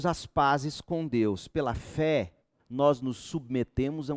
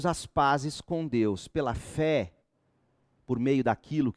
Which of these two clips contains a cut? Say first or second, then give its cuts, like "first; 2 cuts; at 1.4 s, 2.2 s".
first; 1 cut; at 2.6 s